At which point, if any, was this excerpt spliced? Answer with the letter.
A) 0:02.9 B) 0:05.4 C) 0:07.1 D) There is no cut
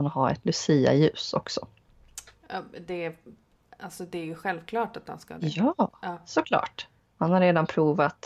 D